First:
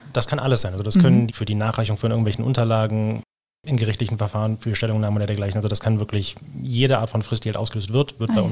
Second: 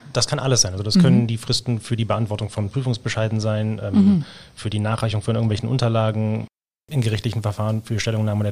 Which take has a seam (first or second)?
first